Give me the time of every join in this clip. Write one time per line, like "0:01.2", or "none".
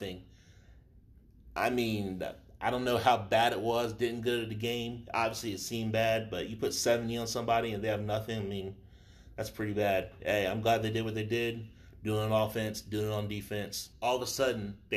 0:13.9